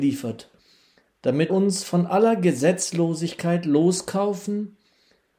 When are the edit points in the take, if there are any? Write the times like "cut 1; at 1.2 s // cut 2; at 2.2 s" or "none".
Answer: cut 1; at 1.5 s